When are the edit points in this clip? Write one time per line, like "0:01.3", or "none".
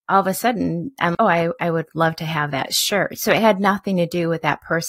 0:01.1